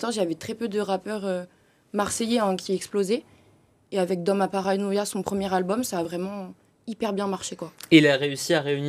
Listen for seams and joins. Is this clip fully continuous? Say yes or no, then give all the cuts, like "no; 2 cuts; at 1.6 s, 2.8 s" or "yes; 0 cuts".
yes; 0 cuts